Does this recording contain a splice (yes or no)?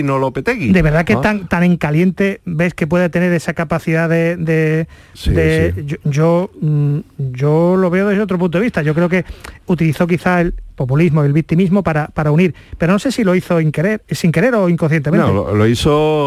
no